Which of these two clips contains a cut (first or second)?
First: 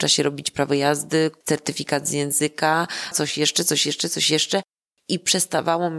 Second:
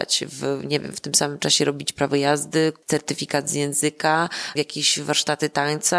first